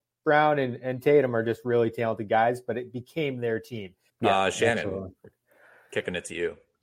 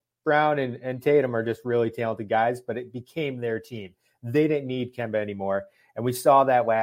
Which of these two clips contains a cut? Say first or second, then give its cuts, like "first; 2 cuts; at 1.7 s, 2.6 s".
first; 1 cut; at 4.1 s